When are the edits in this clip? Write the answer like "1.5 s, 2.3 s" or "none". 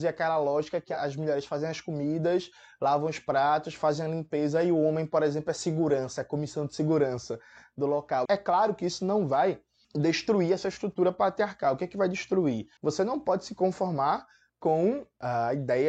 8.3 s, 12.8 s